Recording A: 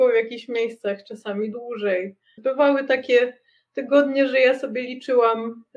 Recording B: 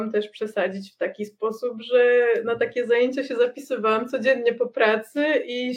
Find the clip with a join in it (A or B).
A